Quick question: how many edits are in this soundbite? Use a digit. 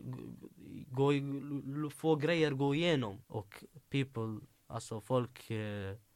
1